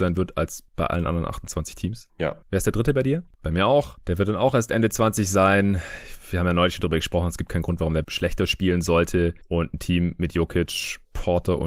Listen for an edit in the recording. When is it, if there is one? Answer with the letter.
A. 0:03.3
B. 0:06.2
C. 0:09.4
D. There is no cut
A